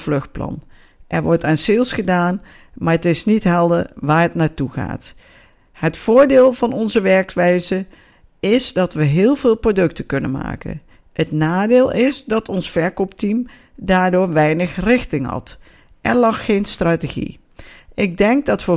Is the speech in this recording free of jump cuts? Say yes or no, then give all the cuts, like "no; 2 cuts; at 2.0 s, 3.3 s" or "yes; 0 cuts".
yes; 0 cuts